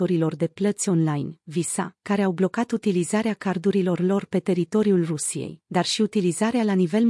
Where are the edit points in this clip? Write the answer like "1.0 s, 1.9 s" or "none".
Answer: 2.0 s